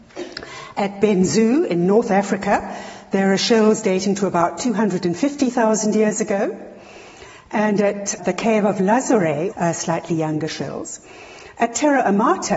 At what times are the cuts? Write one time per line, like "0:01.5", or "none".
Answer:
0:08.2
0:09.5